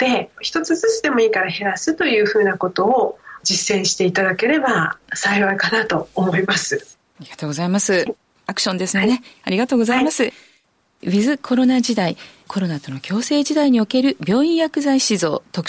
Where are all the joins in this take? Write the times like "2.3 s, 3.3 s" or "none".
8.1 s